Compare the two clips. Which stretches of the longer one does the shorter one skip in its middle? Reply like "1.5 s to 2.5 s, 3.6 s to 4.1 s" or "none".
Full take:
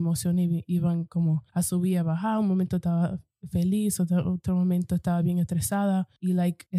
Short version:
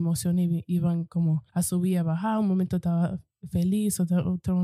none